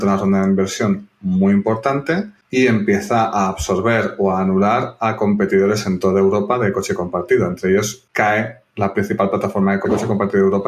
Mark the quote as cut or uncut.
uncut